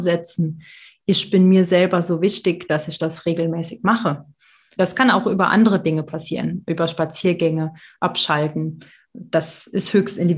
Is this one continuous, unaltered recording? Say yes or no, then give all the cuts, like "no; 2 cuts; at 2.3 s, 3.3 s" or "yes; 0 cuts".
no; 1 cut; at 4.8 s